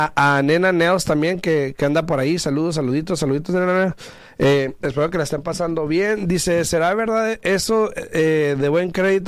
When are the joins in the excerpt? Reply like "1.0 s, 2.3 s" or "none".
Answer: none